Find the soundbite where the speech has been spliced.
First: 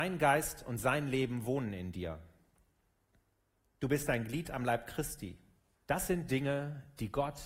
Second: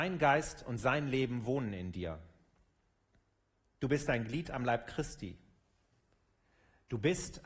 first; 1 cut; at 5.7 s

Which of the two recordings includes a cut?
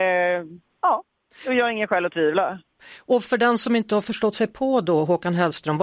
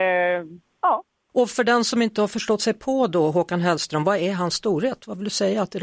second; 1 cut; at 1.3 s

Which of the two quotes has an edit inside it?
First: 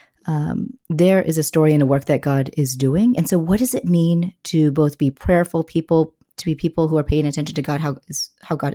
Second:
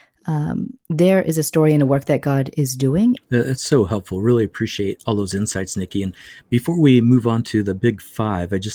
second; 1 cut; at 3.2 s

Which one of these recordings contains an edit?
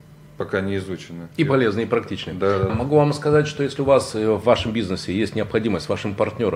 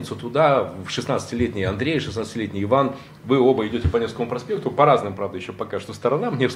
first; 2 cuts; at 1.3 s, 2.7 s

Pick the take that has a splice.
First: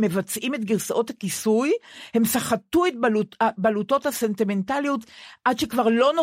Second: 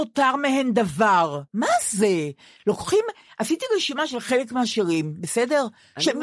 second; 1 cut; at 1.5 s

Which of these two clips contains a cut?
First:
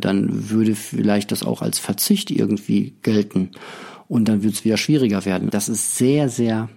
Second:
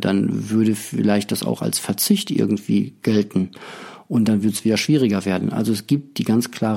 first; 1 cut; at 5.5 s

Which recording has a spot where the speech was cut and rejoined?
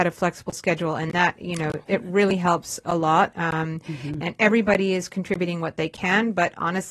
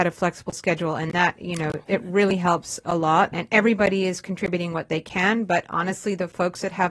second; 1 cut; at 3.3 s

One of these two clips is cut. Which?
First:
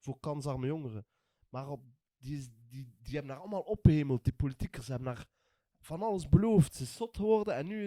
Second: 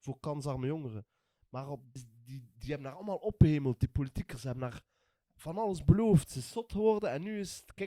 second; 1 cut; at 2.0 s

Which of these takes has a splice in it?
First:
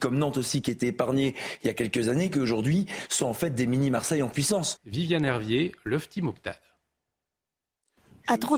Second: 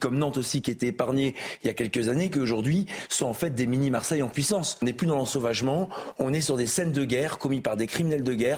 first; 1 cut; at 4.8 s

